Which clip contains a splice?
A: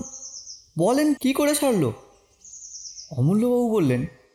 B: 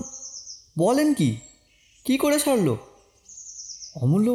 A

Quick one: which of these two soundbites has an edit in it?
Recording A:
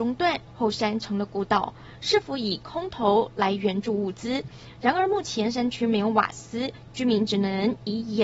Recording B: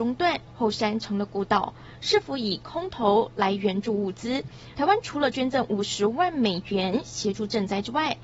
B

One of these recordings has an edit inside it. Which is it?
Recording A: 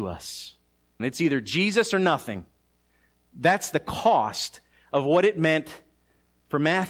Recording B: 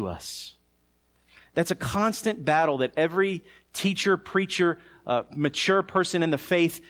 A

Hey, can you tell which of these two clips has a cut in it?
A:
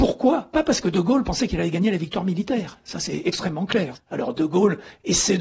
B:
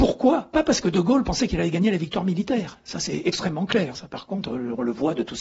A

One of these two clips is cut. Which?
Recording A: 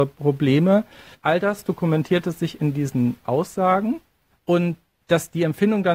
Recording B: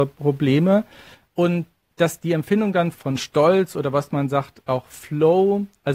A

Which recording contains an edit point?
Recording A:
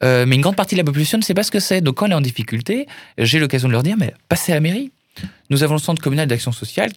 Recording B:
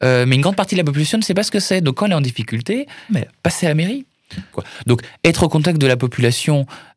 B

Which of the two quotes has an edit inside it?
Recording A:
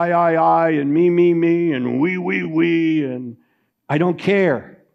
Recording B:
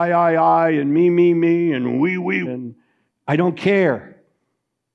B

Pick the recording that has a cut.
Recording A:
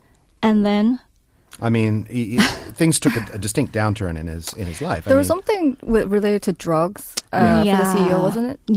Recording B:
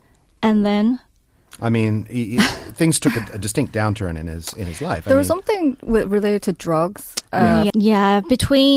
B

